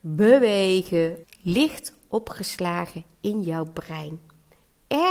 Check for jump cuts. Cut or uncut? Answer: cut